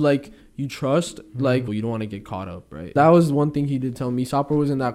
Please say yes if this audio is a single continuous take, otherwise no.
no